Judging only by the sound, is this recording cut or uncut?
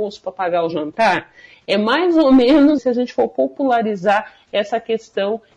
cut